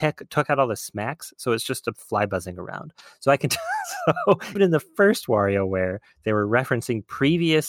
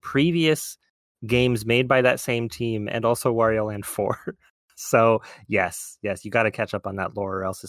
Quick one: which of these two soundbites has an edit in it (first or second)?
first